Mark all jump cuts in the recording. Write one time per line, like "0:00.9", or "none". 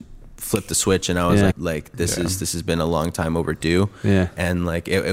0:01.5